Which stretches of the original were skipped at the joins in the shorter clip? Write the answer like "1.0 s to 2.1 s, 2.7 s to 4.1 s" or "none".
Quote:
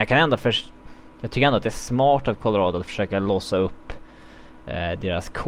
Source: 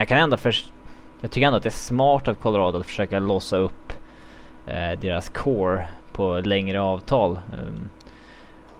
none

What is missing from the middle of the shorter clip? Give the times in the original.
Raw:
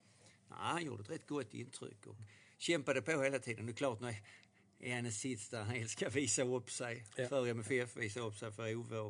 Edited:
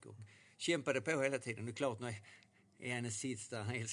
none

